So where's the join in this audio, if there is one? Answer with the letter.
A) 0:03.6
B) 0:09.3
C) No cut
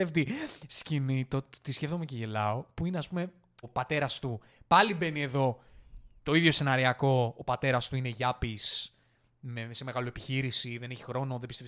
A